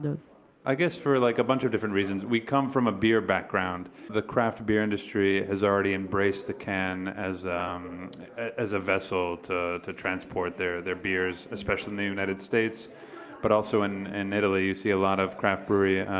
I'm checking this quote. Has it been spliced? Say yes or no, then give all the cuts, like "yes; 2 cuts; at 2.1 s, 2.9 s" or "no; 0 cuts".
no; 0 cuts